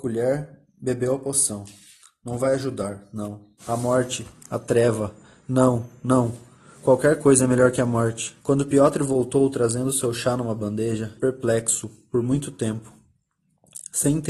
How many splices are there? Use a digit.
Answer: 3